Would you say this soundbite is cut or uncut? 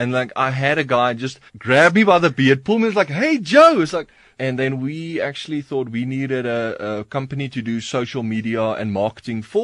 cut